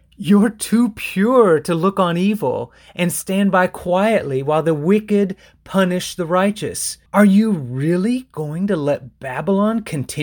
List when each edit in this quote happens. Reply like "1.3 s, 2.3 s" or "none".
7.1 s